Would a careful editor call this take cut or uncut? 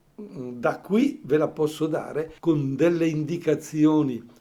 cut